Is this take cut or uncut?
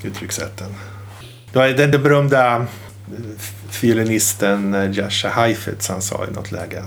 uncut